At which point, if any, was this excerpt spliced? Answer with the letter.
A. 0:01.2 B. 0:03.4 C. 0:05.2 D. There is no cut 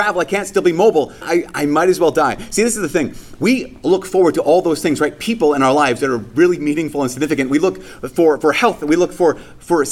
A